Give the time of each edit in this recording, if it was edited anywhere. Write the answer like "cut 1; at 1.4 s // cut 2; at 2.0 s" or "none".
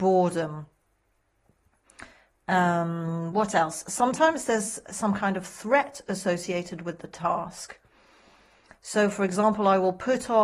none